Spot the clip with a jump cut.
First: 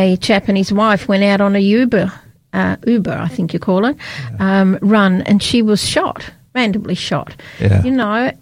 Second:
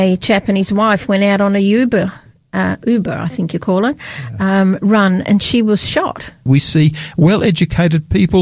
second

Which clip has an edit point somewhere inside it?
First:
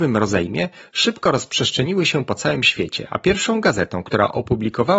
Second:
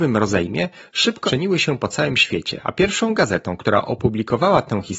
second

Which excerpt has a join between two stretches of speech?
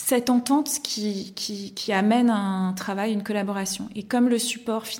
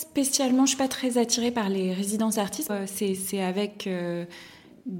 second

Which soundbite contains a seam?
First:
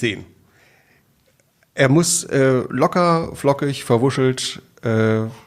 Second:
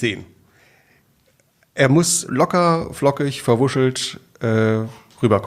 second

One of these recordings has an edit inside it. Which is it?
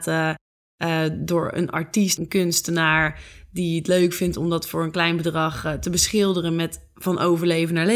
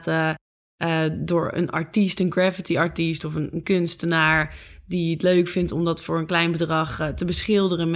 first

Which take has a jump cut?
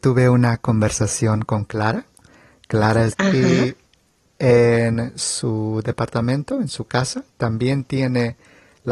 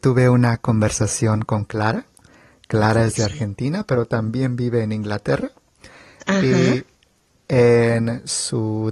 first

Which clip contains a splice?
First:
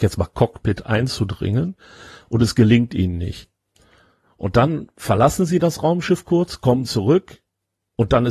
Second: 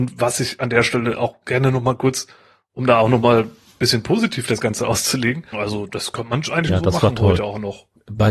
second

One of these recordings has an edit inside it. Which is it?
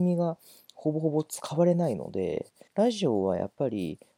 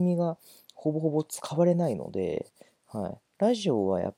first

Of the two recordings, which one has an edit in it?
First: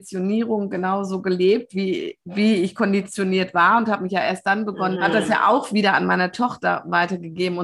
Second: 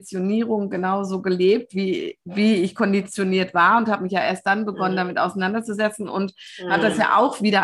first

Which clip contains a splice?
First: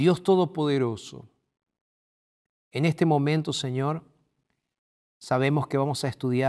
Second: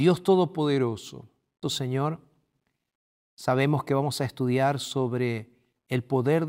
second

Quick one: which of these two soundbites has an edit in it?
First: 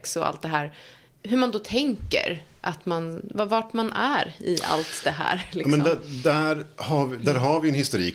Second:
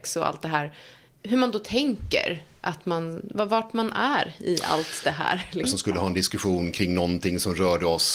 second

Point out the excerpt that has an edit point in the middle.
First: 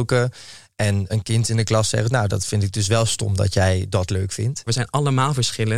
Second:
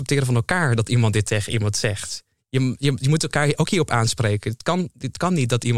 first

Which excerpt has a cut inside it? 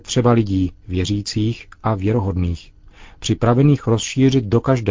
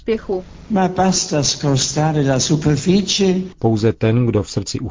second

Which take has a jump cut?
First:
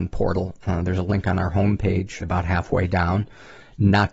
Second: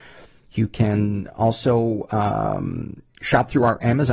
first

